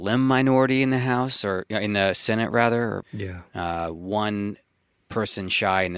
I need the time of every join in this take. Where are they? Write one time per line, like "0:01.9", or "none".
0:03.0